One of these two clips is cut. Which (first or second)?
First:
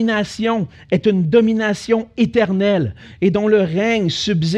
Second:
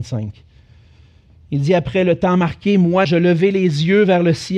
second